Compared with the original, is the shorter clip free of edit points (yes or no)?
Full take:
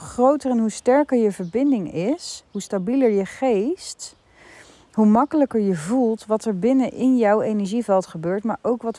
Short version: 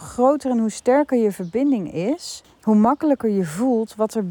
no